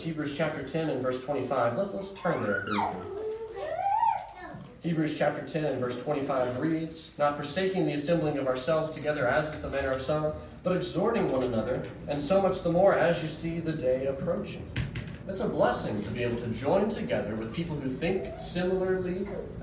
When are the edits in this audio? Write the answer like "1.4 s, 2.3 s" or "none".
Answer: 2.7 s, 15.2 s

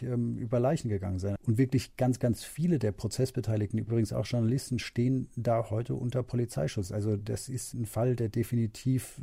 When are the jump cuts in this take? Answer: 1.4 s

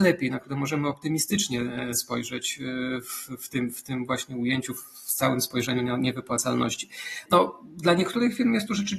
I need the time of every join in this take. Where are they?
7.3 s

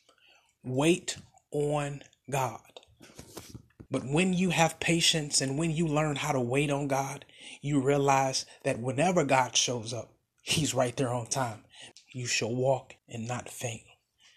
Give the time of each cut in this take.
3.9 s, 11.9 s, 13.0 s

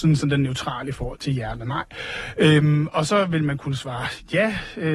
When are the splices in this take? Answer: 1.1 s

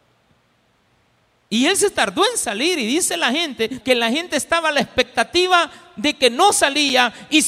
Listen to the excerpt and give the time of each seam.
3.8 s

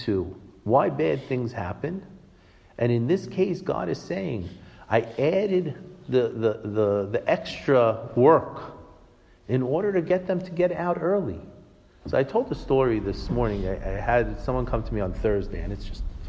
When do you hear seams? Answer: 12.0 s

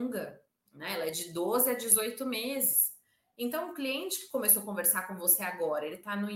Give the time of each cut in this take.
none

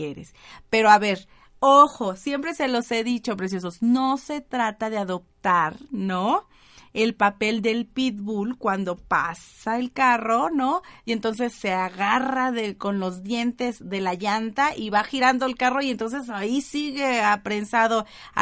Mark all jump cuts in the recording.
none

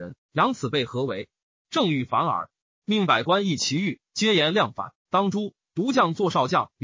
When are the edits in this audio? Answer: none

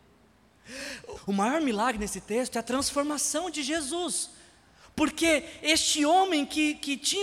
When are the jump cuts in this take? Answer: 1.1 s

